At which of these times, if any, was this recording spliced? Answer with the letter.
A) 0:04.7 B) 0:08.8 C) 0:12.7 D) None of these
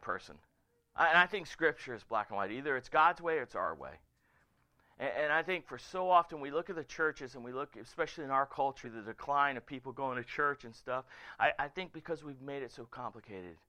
B